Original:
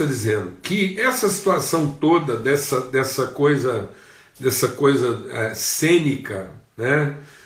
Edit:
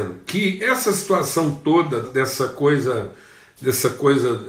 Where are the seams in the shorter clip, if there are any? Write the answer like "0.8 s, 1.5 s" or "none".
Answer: 2.0 s